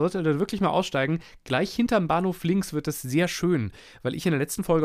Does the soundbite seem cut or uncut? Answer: uncut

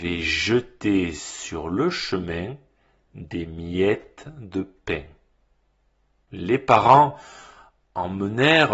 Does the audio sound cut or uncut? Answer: uncut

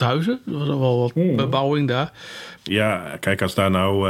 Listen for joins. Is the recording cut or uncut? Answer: cut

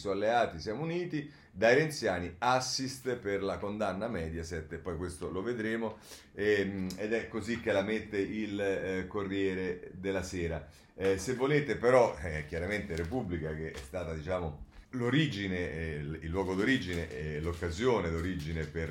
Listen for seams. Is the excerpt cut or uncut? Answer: cut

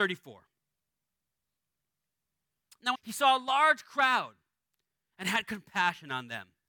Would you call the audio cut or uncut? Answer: cut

